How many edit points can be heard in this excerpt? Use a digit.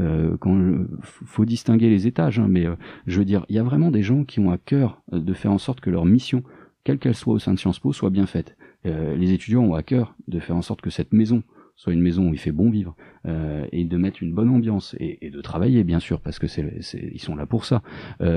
0